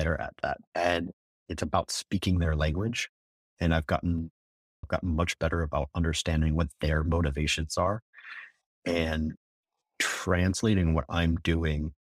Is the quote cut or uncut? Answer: cut